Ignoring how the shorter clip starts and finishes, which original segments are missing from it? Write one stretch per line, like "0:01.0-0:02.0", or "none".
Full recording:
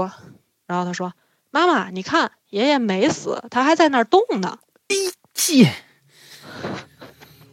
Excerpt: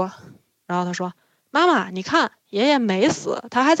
none